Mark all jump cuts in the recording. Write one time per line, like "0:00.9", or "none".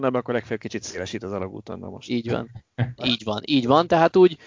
0:03.0